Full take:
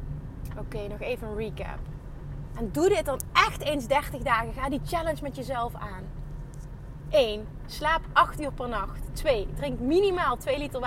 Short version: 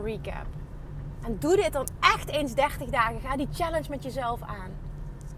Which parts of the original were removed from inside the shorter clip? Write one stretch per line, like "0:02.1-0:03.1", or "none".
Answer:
none